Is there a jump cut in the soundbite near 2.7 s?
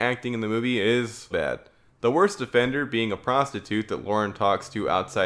no; 1 cut; at 1.3 s

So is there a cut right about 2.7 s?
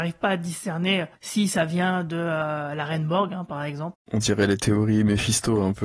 no; 2 cuts; at 1.2 s, 3.9 s

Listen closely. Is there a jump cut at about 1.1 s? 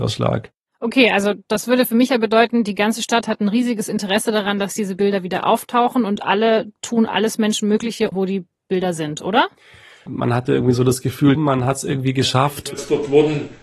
no; 3 cuts; at 8.1 s, 10.1 s, 11.4 s

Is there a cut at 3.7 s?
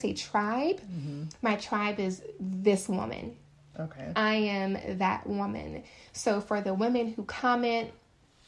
yes; 1 cut; at 3.7 s

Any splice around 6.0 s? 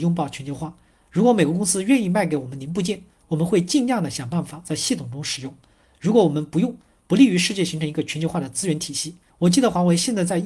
no; 1 cut; at 9.3 s

